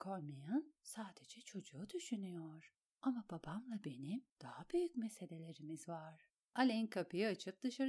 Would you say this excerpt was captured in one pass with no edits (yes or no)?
no